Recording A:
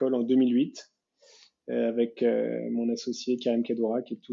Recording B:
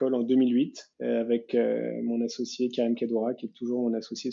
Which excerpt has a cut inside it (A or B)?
B